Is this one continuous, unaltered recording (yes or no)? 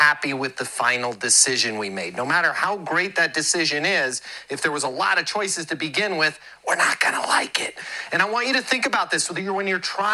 yes